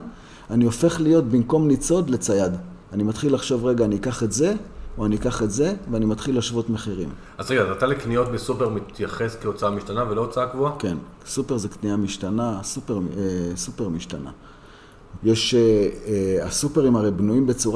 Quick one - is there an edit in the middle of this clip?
yes; 2 cuts; at 2.8 s, 15.2 s

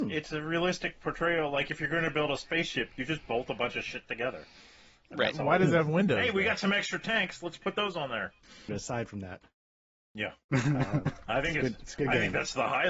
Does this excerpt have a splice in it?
yes; 1 cut; at 8.7 s

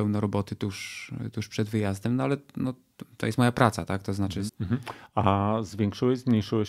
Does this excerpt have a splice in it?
yes; 1 cut; at 4.5 s

